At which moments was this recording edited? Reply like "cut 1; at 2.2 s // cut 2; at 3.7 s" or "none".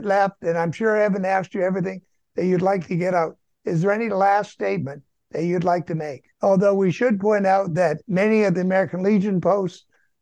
cut 1; at 6.3 s // cut 2; at 8.0 s